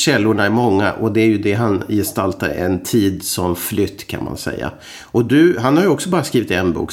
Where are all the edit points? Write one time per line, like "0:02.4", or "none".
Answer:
none